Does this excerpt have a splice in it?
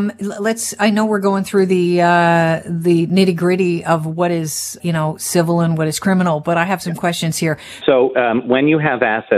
yes; 2 cuts; at 4.8 s, 7.8 s

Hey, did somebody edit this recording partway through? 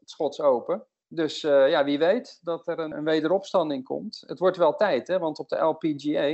yes; 1 cut; at 2.9 s

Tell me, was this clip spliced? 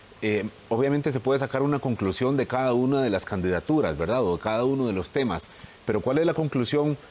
no; 0 cuts

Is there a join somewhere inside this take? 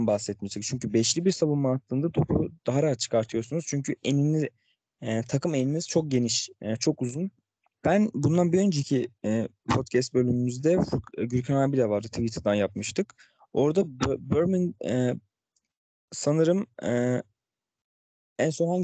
yes; 1 cut; at 7.8 s

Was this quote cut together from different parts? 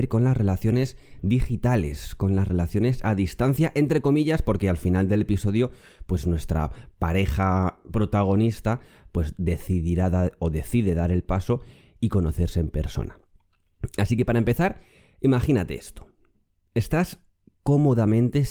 no; 0 cuts

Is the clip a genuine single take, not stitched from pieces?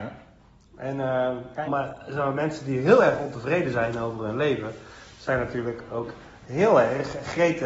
no; 1 cut; at 1.7 s

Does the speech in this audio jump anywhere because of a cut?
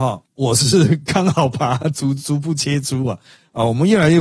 no; 0 cuts

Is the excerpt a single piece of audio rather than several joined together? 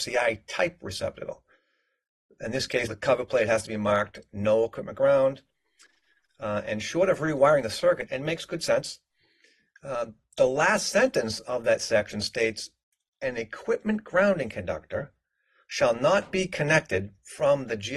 no; 2 cuts; at 2.9 s, 8.1 s

